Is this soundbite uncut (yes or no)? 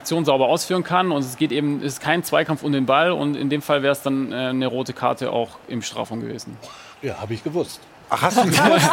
no